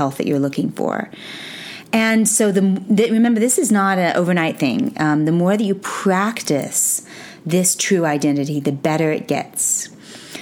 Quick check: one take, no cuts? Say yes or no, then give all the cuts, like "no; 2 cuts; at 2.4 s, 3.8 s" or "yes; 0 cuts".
yes; 0 cuts